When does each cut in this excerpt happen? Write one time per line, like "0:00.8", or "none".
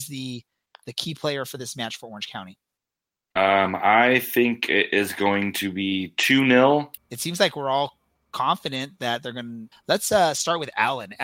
0:07.0
0:09.7